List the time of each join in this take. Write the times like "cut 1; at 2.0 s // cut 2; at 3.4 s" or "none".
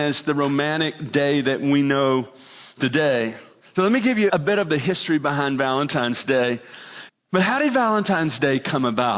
cut 1; at 4.3 s // cut 2; at 7.1 s